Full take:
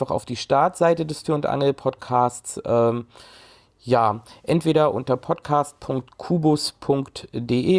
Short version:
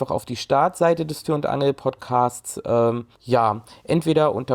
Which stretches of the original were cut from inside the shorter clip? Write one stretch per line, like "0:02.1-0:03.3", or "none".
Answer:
0:03.1-0:03.7